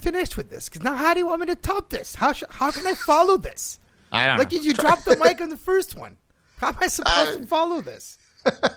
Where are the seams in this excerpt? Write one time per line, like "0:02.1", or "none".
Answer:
none

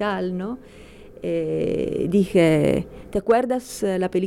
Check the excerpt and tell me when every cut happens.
none

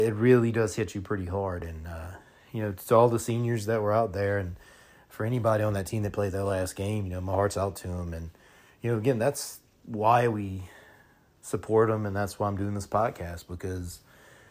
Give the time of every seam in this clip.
none

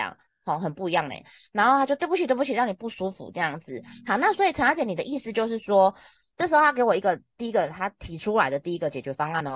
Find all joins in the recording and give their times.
none

